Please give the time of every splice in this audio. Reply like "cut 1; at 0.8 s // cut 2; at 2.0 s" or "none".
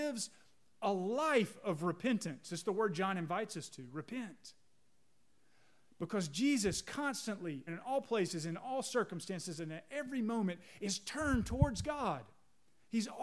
cut 1; at 7.7 s